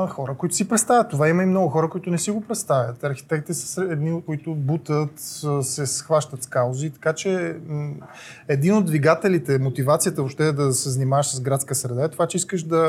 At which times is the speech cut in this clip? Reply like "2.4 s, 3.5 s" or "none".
4.3 s